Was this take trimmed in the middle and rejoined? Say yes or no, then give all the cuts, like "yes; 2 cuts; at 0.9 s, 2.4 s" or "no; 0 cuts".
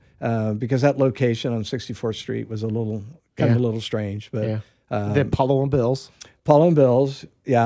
no; 0 cuts